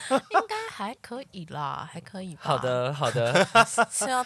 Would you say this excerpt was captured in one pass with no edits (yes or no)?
yes